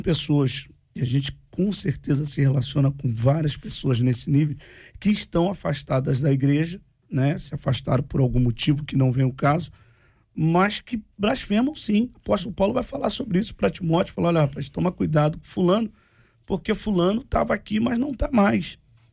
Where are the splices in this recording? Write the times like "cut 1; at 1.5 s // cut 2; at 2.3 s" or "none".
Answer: none